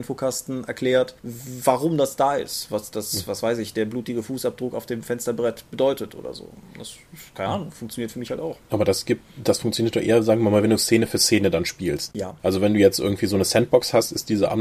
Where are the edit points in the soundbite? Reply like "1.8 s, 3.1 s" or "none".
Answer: none